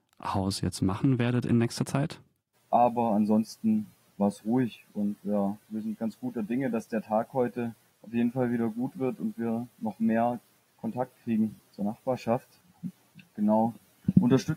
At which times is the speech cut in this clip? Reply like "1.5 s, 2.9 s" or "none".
2.5 s